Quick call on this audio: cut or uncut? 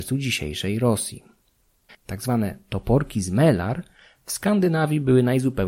cut